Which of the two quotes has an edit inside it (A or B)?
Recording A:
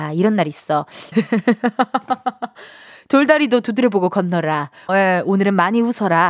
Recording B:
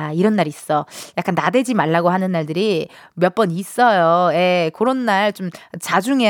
A